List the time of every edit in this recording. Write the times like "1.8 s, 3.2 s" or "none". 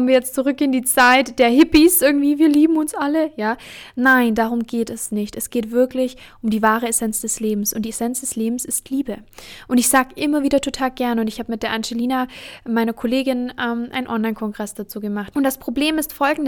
15.3 s